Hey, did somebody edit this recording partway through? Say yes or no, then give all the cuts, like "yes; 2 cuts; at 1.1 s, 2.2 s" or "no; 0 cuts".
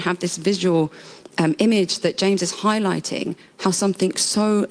no; 0 cuts